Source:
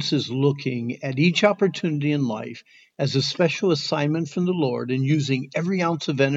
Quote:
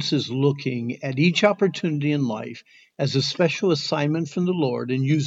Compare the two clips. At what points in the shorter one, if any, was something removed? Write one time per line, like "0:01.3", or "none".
none

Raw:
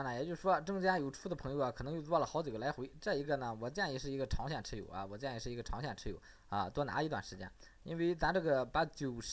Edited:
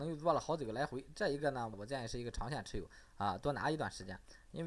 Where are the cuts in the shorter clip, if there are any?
0:01.7

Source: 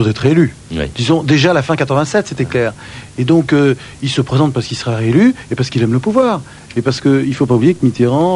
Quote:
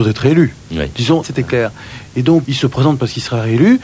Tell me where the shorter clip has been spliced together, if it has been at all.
0:01.2
0:02.4

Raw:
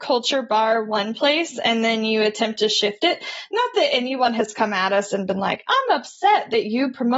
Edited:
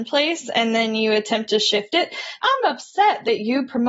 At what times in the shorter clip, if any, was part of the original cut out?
0:02.4

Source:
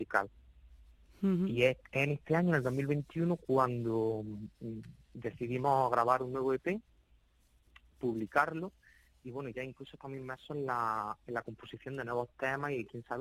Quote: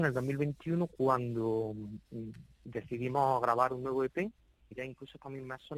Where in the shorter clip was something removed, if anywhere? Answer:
0:04.7

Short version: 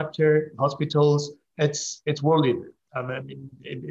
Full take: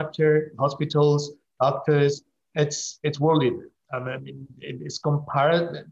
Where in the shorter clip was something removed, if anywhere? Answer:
0:01.5

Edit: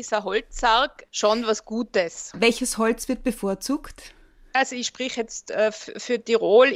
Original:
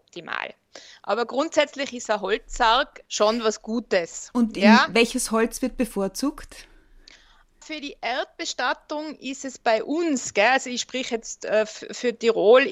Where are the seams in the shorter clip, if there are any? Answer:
0:02.3
0:04.5

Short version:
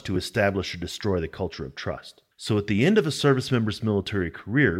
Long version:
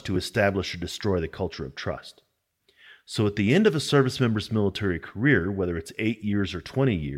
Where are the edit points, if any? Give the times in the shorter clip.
0:02.3

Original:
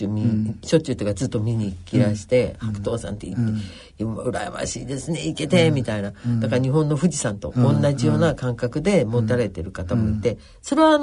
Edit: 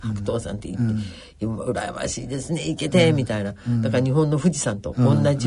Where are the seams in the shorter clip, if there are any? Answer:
none

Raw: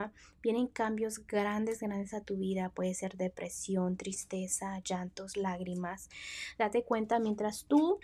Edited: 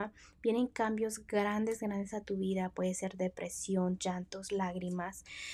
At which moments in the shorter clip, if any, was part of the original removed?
0:04.0

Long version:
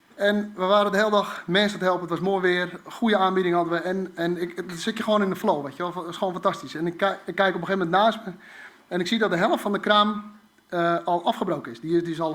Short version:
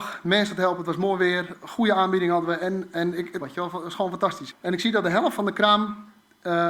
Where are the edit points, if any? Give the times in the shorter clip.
0:03.4
0:04.5

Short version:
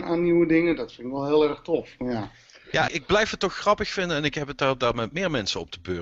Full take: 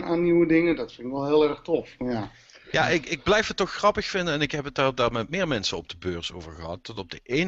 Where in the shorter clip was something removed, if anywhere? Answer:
0:02.9

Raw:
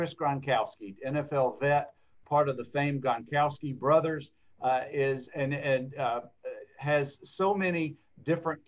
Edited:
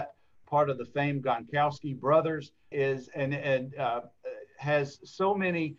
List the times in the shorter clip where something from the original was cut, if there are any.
0:02.7

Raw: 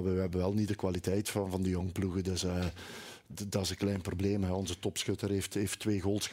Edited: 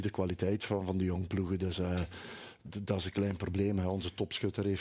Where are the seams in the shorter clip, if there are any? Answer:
none

